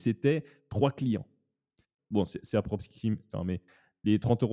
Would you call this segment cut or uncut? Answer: cut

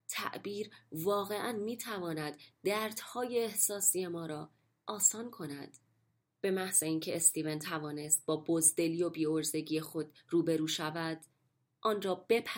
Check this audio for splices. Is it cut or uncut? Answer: cut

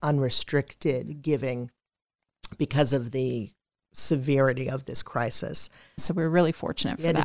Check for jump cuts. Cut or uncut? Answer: cut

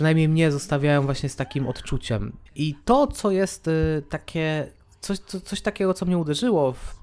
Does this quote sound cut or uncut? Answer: cut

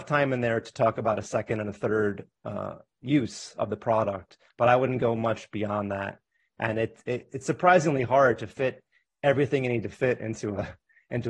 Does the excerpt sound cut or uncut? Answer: uncut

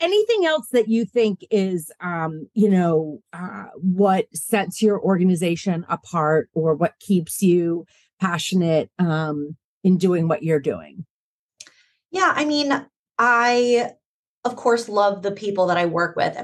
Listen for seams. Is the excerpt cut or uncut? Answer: uncut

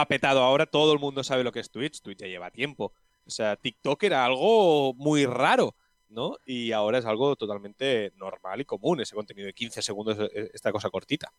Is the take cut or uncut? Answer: cut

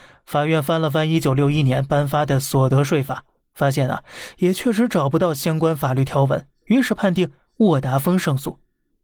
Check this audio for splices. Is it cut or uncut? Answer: uncut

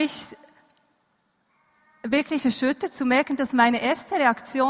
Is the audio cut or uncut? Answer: uncut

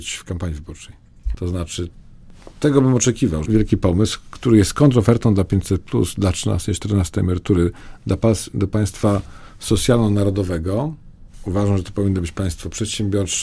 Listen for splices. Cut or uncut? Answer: cut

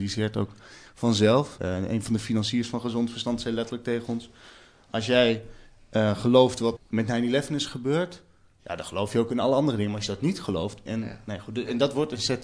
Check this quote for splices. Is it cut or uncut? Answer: cut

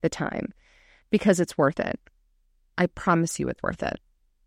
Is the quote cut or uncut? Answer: uncut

